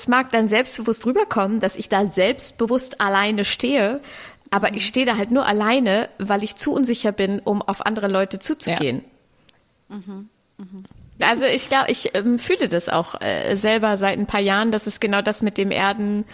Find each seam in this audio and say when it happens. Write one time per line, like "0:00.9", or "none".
0:11.2